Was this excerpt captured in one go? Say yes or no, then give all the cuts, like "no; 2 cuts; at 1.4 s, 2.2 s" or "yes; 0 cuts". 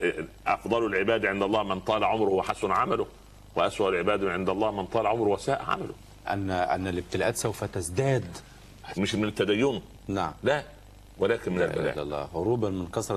no; 2 cuts; at 6.2 s, 8.9 s